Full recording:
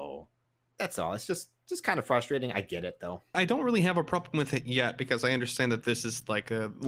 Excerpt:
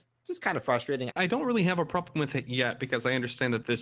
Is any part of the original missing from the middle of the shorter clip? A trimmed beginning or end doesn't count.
yes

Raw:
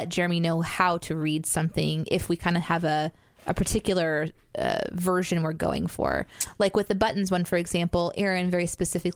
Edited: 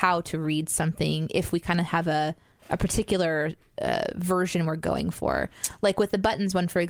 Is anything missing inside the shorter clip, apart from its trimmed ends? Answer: no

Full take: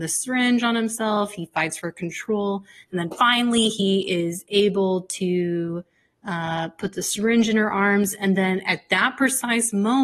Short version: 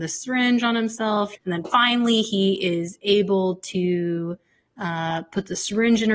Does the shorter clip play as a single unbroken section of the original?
no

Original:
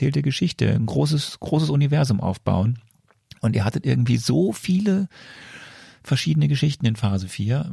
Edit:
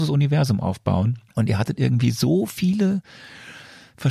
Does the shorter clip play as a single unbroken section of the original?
no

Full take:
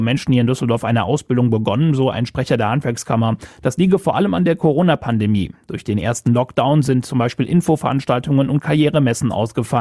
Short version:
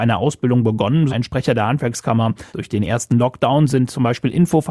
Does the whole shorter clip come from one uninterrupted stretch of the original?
no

